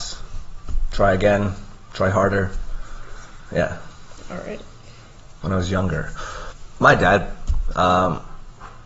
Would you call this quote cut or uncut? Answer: cut